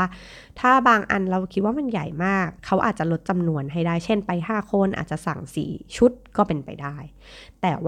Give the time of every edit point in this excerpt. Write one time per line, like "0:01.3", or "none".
0:02.6